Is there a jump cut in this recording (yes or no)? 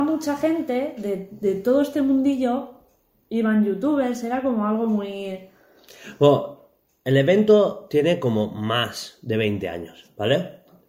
no